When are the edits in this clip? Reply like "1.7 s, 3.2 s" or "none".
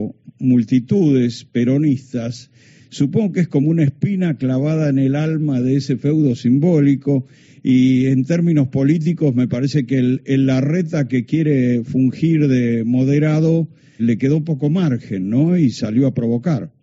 14.0 s

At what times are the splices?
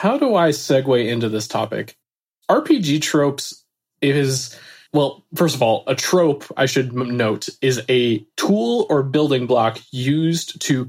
none

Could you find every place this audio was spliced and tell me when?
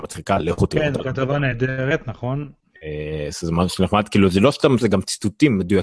4.8 s

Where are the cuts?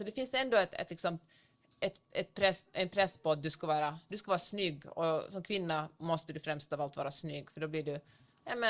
none

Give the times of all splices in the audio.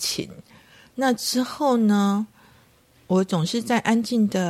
none

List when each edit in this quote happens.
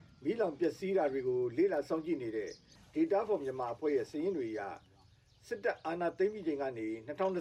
none

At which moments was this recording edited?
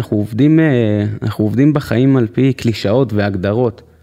none

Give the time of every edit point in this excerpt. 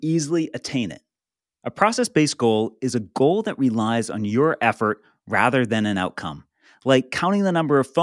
none

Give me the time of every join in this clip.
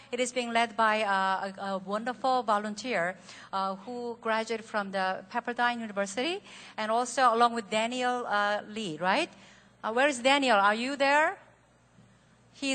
none

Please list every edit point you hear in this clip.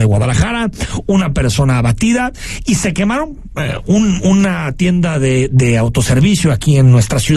none

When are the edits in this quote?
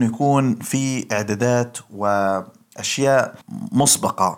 3.4 s

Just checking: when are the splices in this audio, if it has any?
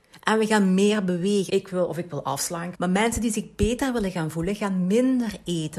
1.5 s, 2.7 s

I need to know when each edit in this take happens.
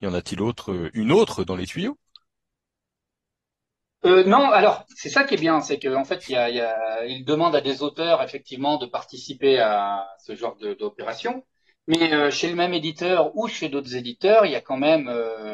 none

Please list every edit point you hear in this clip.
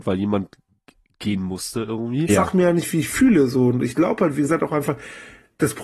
2.3 s

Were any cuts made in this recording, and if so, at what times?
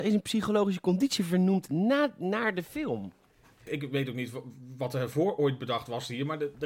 3.7 s

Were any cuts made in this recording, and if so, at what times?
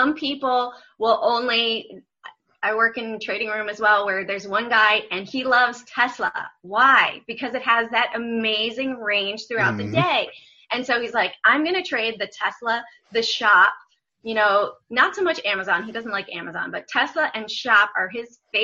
none

